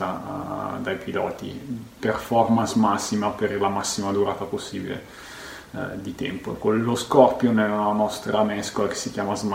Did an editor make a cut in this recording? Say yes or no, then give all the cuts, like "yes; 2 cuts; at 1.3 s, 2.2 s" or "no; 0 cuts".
no; 0 cuts